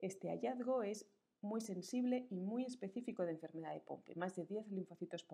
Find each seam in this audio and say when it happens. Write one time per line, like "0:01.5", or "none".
none